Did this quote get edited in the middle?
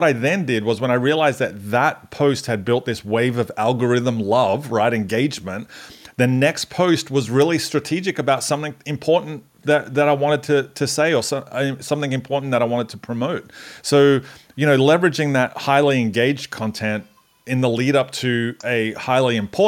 no; 0 cuts

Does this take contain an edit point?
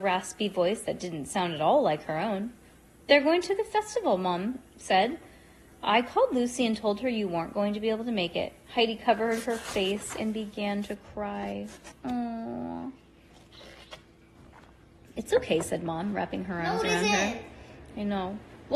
no; 0 cuts

